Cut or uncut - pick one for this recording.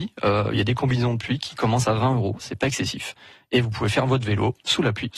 uncut